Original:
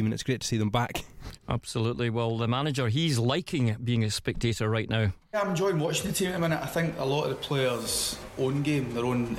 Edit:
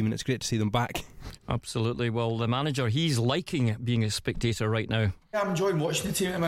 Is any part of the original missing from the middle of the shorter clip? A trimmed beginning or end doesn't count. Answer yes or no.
no